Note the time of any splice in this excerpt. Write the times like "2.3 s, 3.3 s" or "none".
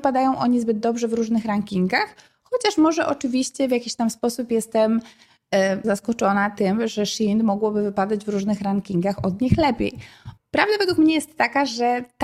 5.8 s, 10.4 s